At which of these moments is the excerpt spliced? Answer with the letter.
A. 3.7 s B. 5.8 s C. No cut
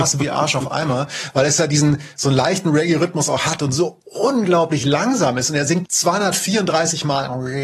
B